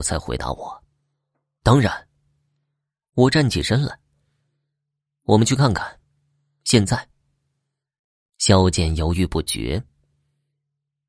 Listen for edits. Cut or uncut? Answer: cut